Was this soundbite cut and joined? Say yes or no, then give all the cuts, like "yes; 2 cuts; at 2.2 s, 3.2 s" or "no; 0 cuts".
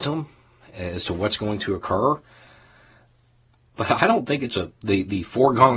yes; 1 cut; at 3.7 s